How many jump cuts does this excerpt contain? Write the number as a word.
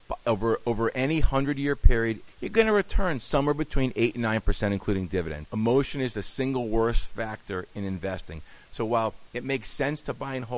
two